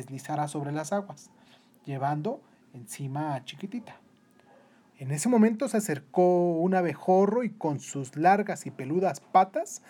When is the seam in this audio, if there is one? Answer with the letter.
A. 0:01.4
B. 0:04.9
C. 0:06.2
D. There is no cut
B